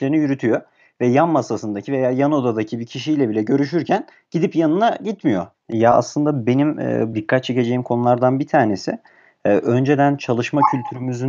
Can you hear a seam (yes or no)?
yes